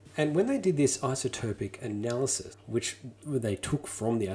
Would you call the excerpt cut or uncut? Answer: cut